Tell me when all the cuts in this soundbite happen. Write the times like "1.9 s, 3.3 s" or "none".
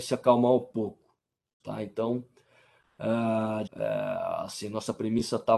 1.6 s, 3.7 s